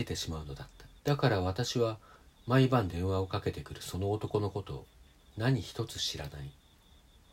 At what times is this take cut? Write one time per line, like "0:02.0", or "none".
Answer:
0:01.0